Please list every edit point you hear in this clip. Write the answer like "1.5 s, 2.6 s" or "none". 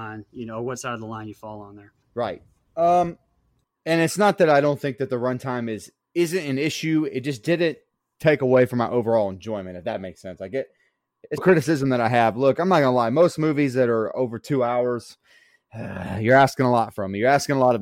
2.0 s, 11.4 s